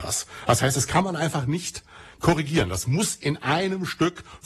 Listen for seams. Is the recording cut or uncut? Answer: uncut